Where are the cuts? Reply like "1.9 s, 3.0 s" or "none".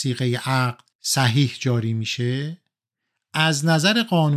0.9 s